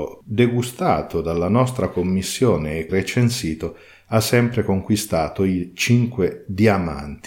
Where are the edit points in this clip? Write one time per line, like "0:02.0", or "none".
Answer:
0:02.9